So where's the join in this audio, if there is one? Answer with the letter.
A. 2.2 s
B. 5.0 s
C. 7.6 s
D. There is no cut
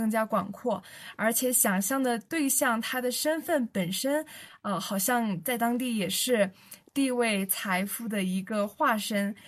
D